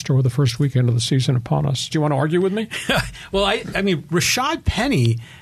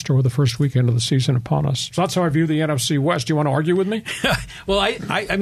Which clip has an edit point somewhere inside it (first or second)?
first